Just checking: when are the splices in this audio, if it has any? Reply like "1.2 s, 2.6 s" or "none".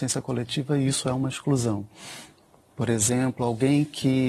2.7 s

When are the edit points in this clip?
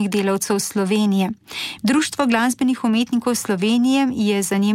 1.8 s

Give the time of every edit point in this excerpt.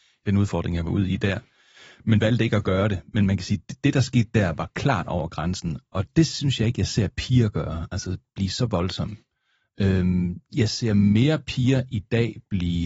none

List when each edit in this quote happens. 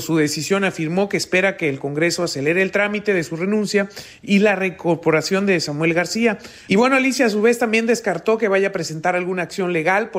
6.7 s

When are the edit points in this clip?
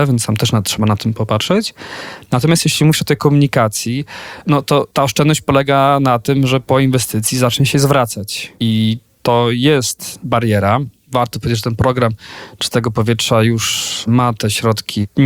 none

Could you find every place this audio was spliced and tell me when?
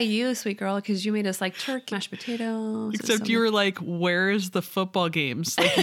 1.9 s

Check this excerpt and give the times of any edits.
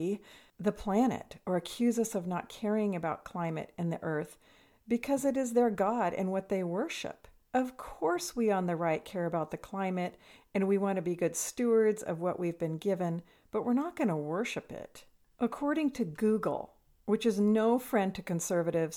none

